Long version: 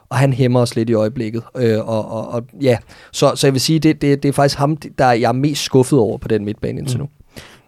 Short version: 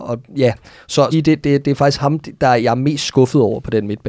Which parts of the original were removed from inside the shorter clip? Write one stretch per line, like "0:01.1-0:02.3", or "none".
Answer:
0:03.4-0:03.7